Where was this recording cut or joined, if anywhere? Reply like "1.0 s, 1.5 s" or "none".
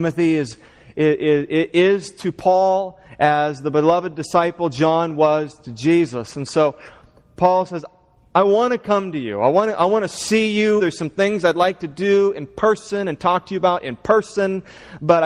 10.8 s